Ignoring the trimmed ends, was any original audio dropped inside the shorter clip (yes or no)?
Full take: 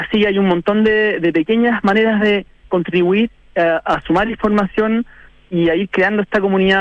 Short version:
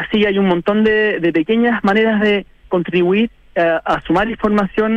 no